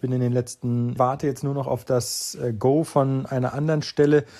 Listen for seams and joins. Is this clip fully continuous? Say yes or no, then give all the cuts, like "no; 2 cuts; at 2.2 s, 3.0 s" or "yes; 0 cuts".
no; 1 cut; at 1.0 s